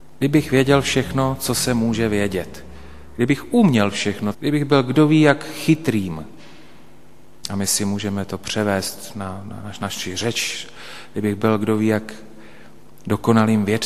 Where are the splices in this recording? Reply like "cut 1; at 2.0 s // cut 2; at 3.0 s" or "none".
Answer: cut 1; at 4.3 s // cut 2; at 7.4 s